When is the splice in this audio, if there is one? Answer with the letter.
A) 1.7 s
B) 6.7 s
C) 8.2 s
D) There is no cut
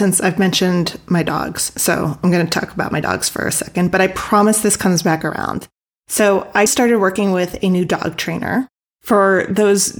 B